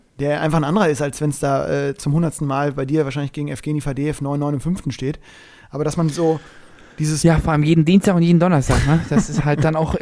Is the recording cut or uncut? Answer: uncut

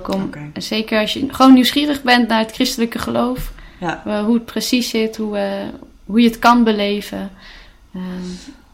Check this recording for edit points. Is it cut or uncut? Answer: uncut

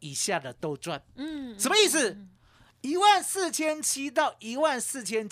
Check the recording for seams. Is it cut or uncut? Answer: cut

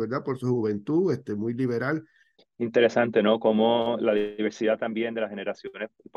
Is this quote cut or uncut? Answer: cut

